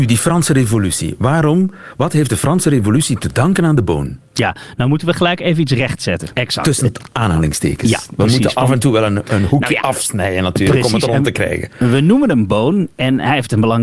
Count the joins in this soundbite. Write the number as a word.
one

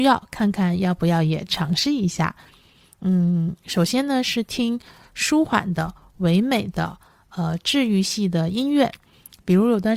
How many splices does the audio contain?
zero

